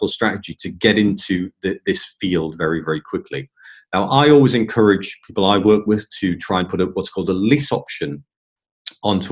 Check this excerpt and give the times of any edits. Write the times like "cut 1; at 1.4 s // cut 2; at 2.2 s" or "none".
none